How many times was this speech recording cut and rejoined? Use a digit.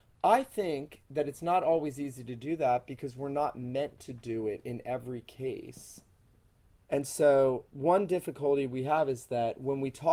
1